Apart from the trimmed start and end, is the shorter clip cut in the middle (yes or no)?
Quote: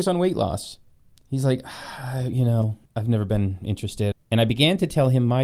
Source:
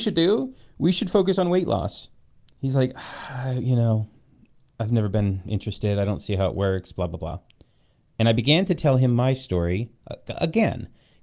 yes